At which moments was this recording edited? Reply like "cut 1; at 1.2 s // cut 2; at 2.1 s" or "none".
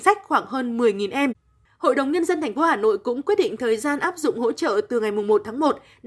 cut 1; at 1.7 s